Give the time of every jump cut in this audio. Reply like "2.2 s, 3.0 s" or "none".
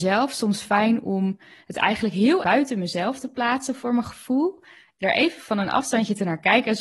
2.4 s

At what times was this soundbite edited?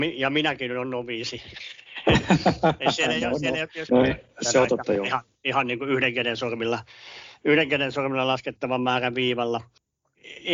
3.9 s

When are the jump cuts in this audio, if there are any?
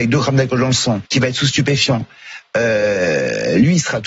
1.1 s

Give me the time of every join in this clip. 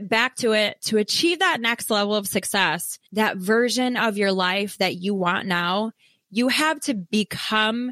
3.1 s

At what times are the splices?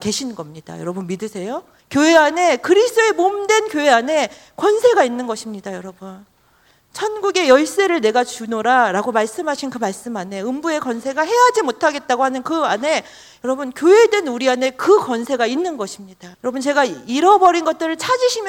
1.8 s, 16.3 s

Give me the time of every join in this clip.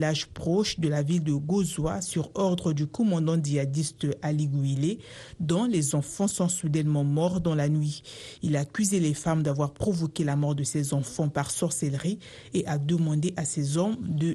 none

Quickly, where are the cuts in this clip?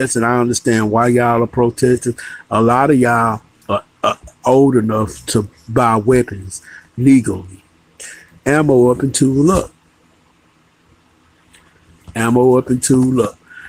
none

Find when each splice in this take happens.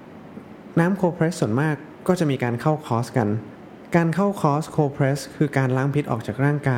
none

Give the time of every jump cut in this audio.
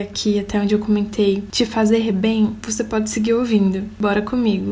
2.6 s

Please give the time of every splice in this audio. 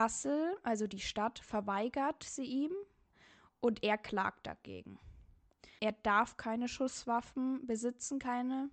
5.8 s

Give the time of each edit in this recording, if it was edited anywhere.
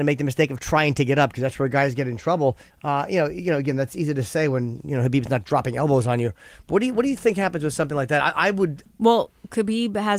2.7 s, 8.8 s

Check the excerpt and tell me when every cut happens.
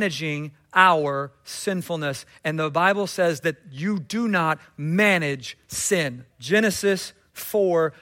6.3 s

